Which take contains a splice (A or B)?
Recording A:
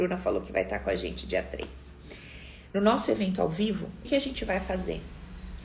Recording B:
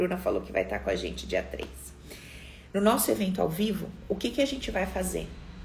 A